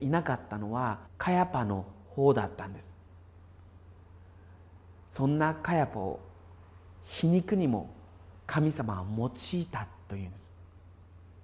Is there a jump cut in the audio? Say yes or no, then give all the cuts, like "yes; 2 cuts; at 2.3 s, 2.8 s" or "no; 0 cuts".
yes; 1 cut; at 1.1 s